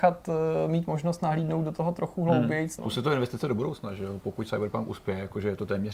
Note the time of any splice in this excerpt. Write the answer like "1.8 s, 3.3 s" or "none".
2.8 s